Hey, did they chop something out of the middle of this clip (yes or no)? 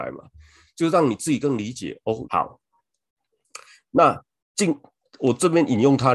yes